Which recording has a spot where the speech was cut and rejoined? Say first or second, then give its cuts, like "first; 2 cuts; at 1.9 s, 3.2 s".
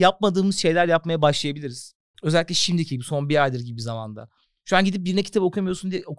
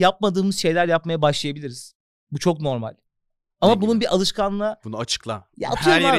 first; 1 cut; at 2.1 s